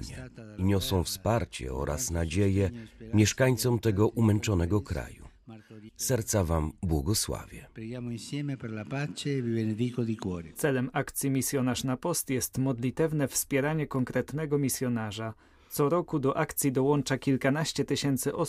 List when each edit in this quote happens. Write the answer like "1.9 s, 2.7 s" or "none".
5.9 s